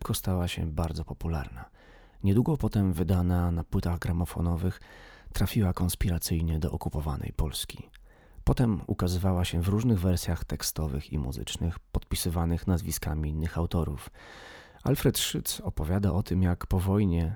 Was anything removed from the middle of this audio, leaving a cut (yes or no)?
no